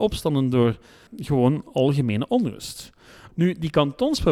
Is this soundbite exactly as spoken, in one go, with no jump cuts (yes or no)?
no